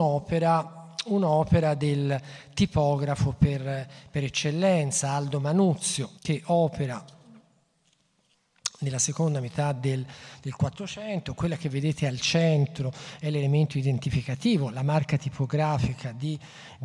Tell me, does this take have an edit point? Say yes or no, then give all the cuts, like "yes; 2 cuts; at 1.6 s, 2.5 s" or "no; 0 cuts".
yes; 1 cut; at 6.2 s